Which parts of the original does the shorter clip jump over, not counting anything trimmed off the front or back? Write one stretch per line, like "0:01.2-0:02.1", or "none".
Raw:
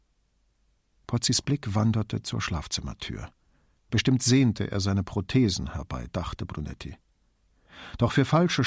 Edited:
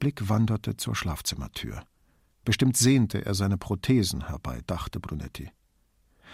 none